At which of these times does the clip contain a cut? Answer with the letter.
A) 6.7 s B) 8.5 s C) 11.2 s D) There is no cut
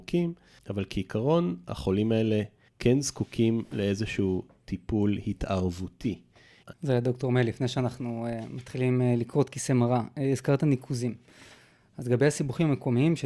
A